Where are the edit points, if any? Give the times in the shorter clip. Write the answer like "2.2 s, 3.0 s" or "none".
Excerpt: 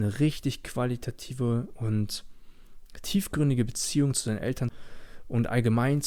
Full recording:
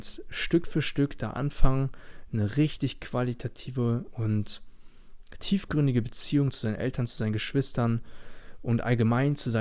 4.7 s